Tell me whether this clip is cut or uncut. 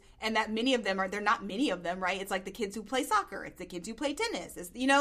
uncut